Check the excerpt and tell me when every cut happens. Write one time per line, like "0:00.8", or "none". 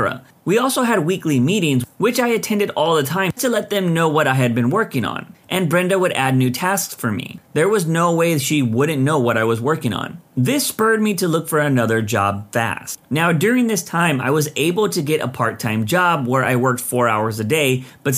0:03.4